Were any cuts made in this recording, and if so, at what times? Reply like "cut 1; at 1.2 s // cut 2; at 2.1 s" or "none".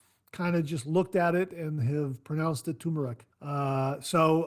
cut 1; at 3.3 s